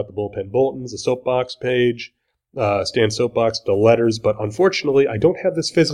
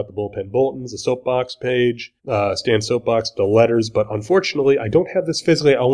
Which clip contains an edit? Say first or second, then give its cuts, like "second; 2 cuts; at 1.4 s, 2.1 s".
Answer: second; 1 cut; at 2.2 s